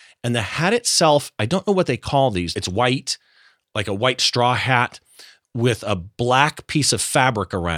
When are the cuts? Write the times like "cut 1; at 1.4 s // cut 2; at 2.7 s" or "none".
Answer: cut 1; at 2.5 s